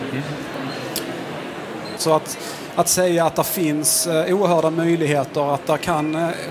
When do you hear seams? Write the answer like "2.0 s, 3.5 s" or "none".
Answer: 2.0 s